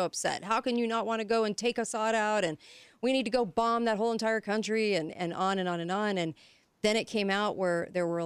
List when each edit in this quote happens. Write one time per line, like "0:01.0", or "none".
none